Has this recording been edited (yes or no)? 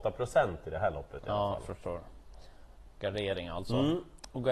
no